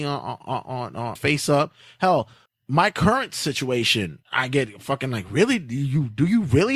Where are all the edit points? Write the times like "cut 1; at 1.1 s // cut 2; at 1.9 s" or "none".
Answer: cut 1; at 1.2 s // cut 2; at 2.5 s // cut 3; at 4.2 s